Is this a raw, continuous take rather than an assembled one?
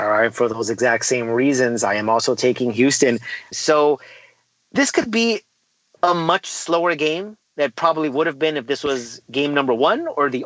no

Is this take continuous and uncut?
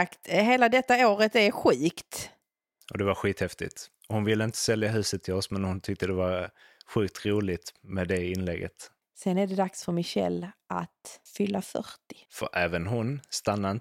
no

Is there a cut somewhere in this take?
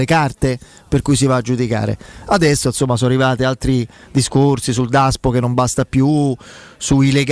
no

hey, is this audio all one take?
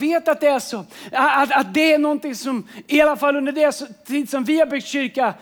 yes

